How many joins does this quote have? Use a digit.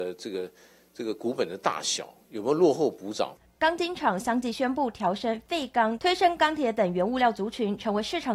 2